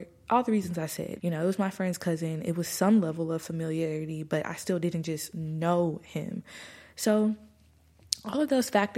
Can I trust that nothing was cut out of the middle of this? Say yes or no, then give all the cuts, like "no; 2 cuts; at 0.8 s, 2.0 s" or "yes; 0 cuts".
no; 1 cut; at 1.2 s